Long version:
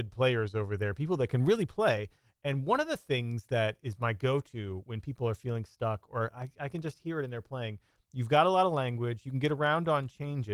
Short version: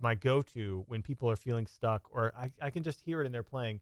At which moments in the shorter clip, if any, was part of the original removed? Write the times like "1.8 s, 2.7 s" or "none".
none